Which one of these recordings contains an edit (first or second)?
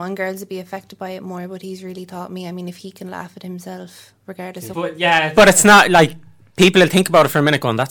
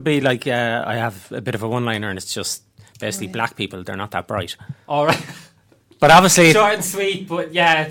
first